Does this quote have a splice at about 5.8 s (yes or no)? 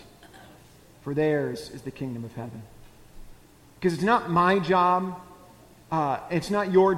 no